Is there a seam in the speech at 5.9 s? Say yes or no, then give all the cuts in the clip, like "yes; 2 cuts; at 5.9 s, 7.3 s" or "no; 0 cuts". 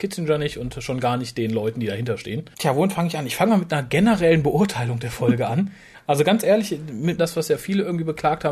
yes; 2 cuts; at 5.9 s, 7.2 s